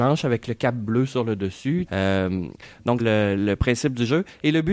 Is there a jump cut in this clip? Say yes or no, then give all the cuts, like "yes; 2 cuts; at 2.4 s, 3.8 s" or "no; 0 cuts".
yes; 2 cuts; at 1.9 s, 3.0 s